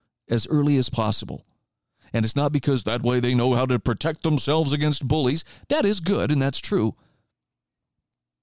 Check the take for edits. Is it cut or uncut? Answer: uncut